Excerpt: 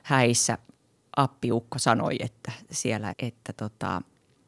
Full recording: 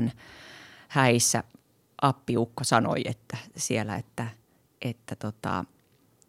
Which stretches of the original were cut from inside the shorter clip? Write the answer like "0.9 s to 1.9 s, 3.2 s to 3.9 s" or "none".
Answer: 4.0 s to 4.7 s